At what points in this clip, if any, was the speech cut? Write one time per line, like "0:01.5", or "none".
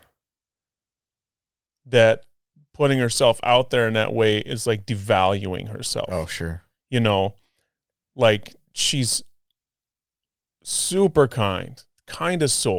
none